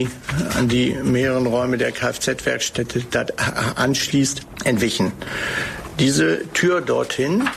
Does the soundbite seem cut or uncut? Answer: uncut